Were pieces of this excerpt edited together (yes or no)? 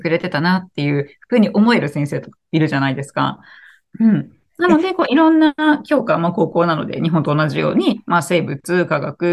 no